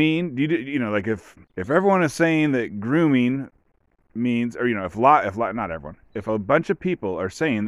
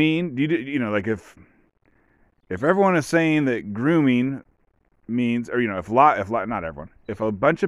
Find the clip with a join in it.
first; 1 cut; at 1.4 s

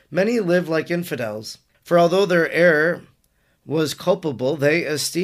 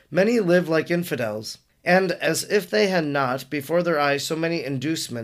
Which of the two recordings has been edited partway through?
first; 1 cut; at 1.7 s

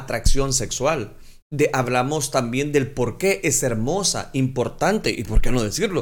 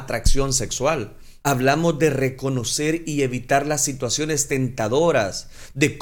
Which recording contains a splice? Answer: second; 1 cut; at 1.4 s

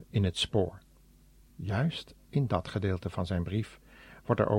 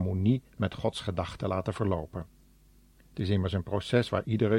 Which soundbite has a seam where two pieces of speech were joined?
first; 1 cut; at 1.5 s

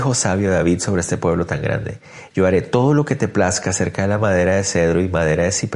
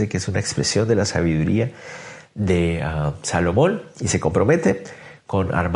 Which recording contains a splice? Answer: first; 1 cut; at 2.3 s

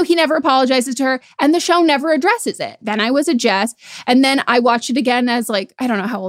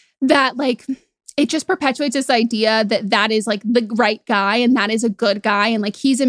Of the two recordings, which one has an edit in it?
first; 1 cut; at 2.8 s

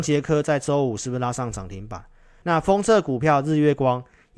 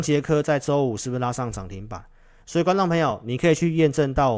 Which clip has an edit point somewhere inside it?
first; 1 cut; at 2.4 s

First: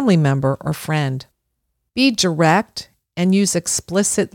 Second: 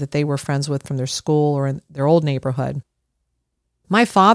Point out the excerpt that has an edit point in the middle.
first; 1 cut; at 1.8 s

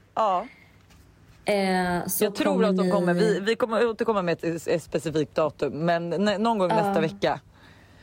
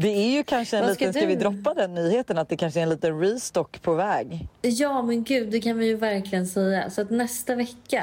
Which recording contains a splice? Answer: second; 1 cut; at 4.5 s

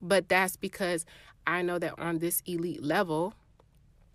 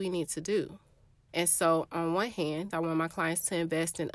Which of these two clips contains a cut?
second; 2 cuts; at 1.3 s, 2.7 s

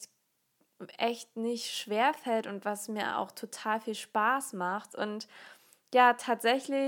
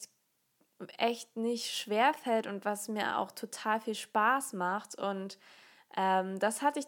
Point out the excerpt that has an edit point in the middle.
first; 1 cut; at 4.9 s

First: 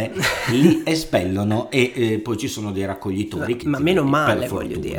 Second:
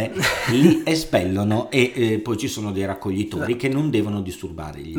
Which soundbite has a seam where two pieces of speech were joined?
first; 1 cut; at 3.6 s

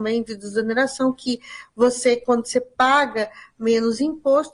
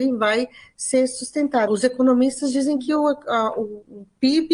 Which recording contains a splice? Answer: second; 1 cut; at 1.7 s

